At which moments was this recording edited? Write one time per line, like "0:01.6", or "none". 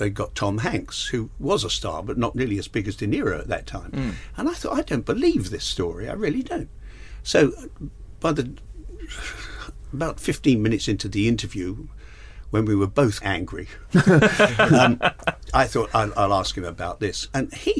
0:13.2
0:15.5